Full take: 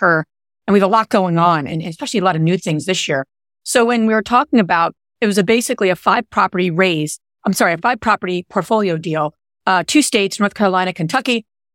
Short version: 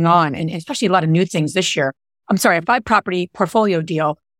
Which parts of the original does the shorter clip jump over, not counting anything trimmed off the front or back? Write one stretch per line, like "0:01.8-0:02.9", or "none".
0:03.5-0:07.4